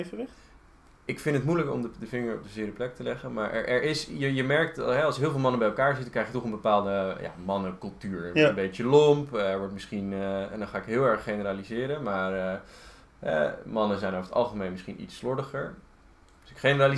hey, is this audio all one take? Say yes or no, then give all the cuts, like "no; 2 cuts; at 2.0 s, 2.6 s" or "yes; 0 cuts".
yes; 0 cuts